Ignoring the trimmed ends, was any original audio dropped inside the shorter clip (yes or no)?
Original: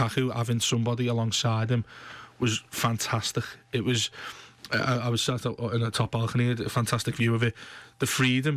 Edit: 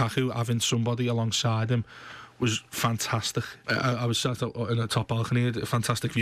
yes